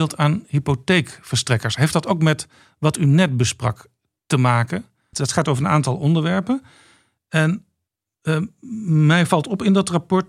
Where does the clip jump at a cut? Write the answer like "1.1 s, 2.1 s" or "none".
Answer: 5.1 s